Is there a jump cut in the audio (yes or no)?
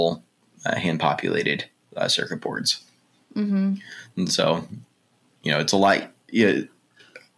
no